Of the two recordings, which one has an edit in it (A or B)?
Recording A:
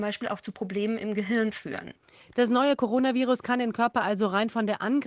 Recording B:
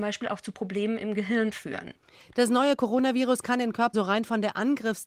B